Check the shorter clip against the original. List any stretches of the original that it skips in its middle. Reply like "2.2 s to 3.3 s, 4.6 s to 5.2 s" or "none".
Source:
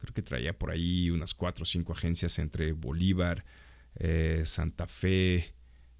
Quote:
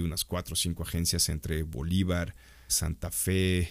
3.8 s to 4.5 s